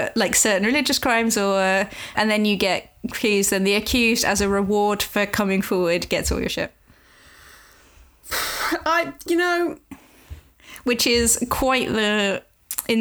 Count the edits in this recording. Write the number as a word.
one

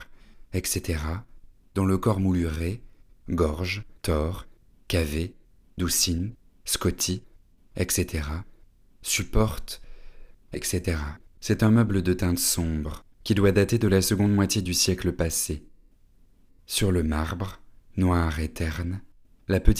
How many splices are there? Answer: three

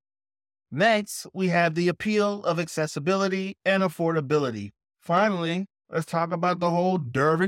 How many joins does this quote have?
one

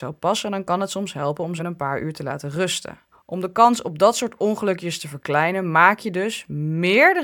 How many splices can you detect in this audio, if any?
two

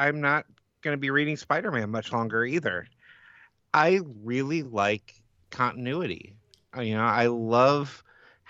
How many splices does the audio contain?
zero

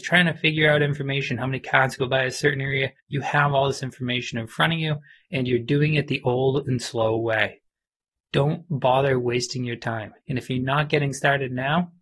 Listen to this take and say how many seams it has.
two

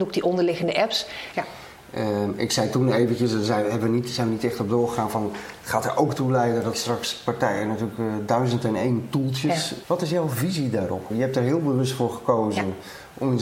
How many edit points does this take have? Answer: three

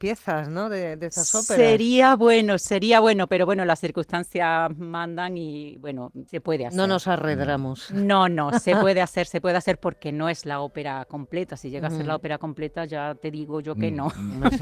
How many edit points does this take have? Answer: one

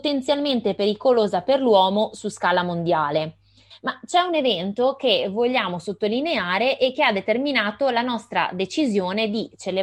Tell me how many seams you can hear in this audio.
one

